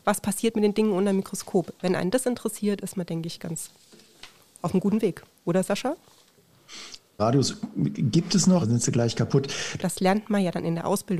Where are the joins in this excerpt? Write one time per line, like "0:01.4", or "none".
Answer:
0:07.2
0:08.6
0:09.8